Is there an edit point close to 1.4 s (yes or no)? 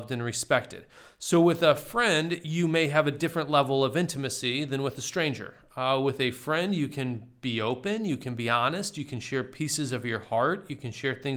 no